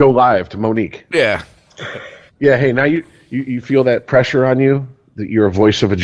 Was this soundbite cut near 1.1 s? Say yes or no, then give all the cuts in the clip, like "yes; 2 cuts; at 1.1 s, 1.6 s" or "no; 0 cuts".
no; 1 cut; at 2.3 s